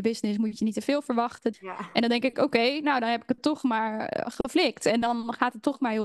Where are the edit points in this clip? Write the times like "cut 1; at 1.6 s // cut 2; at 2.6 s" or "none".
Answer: cut 1; at 1.5 s